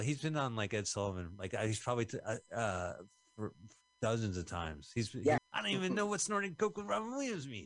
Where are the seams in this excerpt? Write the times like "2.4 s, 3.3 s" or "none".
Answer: 5.4 s